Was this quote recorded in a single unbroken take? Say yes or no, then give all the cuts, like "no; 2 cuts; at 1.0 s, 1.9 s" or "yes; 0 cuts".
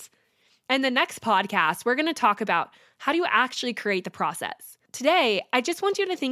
no; 1 cut; at 4.8 s